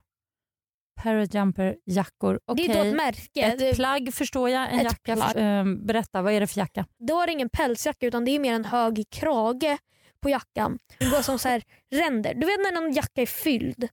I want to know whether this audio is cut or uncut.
cut